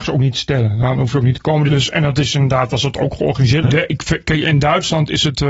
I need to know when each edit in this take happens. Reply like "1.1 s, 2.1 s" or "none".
1.7 s, 3.6 s